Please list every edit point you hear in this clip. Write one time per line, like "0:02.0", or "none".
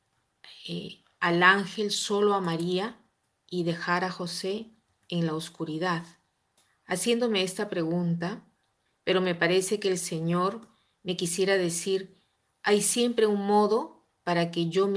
0:08.9